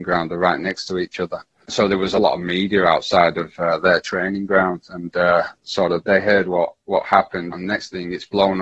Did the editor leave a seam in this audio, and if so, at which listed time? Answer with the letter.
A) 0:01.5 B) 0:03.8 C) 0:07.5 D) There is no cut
C